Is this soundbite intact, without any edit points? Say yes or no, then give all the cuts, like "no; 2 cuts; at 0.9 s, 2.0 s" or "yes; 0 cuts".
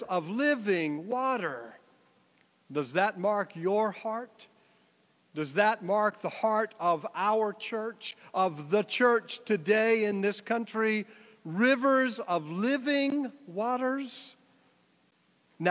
yes; 0 cuts